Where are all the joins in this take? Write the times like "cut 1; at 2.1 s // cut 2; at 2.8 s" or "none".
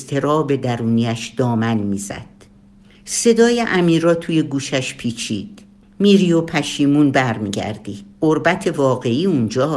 cut 1; at 8.1 s